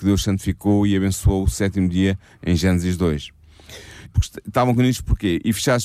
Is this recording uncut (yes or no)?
no